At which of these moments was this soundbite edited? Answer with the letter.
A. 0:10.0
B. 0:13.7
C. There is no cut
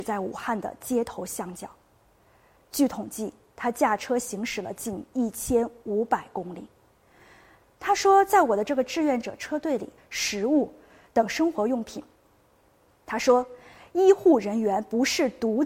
A